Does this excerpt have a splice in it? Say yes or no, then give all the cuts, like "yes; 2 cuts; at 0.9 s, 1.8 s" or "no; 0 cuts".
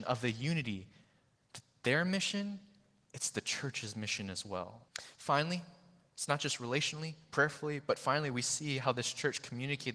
yes; 1 cut; at 4.9 s